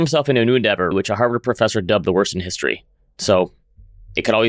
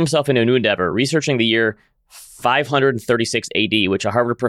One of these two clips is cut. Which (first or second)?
first